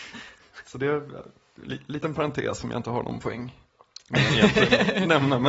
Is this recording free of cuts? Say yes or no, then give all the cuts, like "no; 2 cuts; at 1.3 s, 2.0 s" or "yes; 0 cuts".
yes; 0 cuts